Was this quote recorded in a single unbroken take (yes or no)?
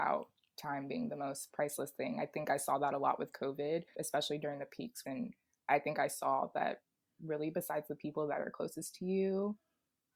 no